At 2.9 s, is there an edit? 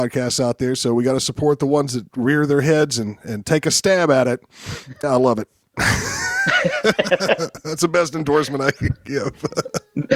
no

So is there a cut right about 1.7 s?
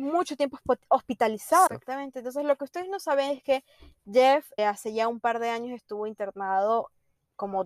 yes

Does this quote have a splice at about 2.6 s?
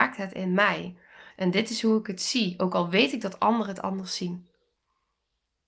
no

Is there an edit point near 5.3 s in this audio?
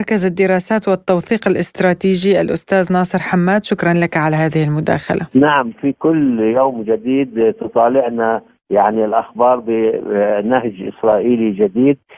yes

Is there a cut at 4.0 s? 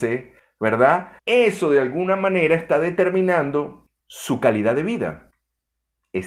yes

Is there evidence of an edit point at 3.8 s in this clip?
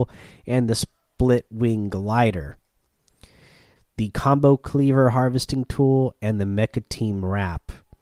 yes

